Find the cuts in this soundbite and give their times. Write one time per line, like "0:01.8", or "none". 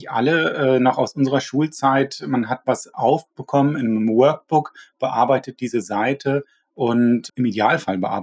none